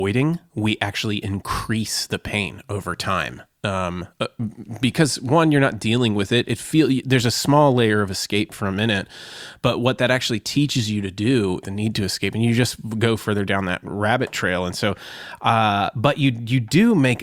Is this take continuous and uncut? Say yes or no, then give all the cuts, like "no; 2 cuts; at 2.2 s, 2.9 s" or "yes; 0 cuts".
no; 1 cut; at 11.6 s